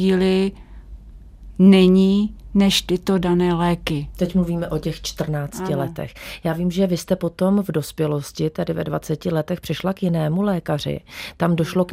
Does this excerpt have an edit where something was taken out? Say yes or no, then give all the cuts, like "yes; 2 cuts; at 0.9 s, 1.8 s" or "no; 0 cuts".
no; 0 cuts